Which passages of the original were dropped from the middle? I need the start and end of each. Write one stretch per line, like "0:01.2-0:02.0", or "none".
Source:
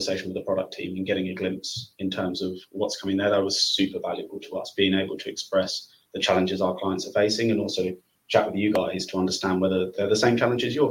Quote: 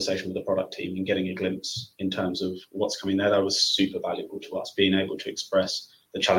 none